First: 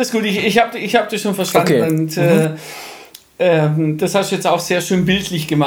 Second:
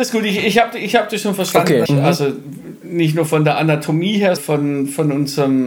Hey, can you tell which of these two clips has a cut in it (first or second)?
second